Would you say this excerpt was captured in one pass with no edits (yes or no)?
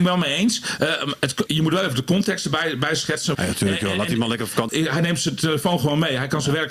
no